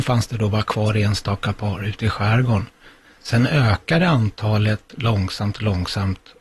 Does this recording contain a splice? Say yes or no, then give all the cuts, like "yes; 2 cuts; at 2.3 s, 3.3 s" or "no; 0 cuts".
no; 0 cuts